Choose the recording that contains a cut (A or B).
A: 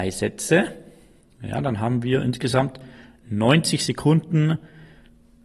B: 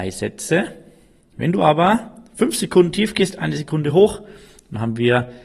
B